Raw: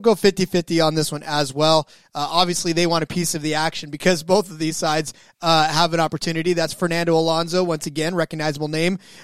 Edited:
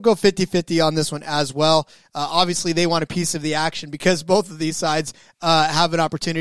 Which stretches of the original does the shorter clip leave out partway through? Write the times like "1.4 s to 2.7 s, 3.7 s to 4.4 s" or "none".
none